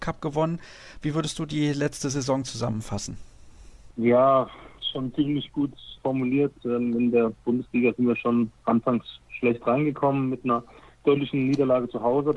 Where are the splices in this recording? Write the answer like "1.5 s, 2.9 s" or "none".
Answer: none